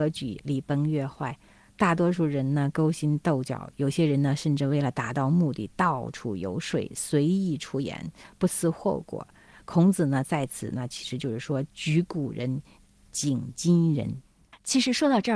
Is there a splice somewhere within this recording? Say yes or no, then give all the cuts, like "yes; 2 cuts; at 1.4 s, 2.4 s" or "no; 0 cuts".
no; 0 cuts